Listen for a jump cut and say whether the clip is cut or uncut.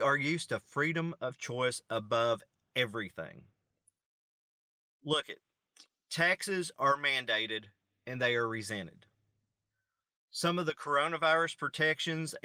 uncut